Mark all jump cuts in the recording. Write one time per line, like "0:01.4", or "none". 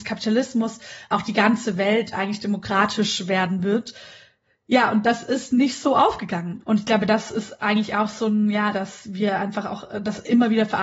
0:06.6
0:08.7